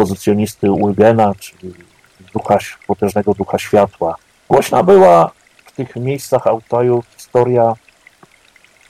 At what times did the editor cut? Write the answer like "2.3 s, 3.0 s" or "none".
4.3 s